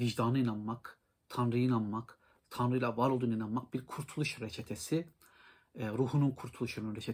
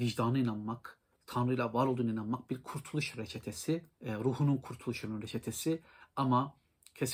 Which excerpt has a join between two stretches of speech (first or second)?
second